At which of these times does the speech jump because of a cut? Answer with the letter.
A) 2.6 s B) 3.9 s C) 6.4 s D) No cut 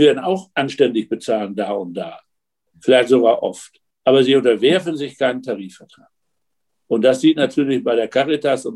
B